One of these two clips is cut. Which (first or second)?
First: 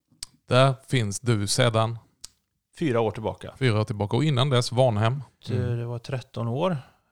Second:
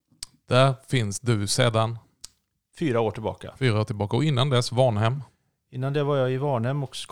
first